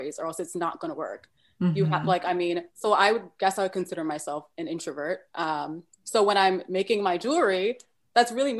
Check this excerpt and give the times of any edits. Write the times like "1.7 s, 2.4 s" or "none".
2.7 s

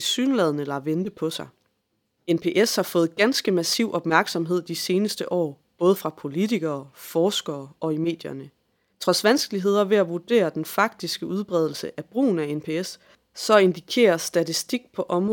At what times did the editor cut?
2.2 s, 8.9 s

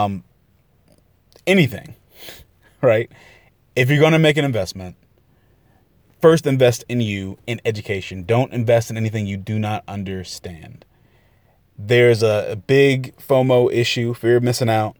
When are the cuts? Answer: none

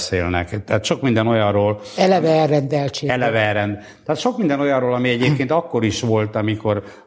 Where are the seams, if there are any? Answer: none

